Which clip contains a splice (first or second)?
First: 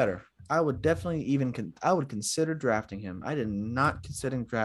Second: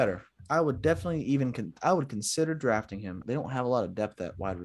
second